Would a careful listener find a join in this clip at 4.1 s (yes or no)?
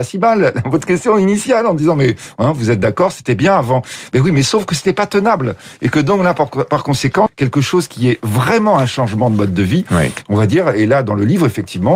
no